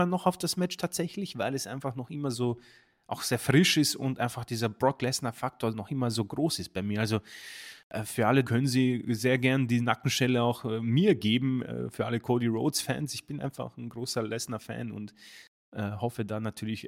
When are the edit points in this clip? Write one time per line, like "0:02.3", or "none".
0:08.5
0:13.4